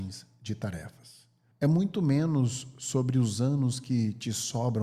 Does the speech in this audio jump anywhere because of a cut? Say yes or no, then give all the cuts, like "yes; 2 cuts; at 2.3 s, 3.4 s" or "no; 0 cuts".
yes; 1 cut; at 1.5 s